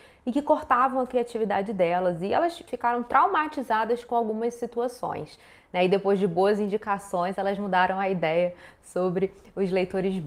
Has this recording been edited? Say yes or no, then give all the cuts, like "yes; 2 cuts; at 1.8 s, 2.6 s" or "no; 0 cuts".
yes; 1 cut; at 2.7 s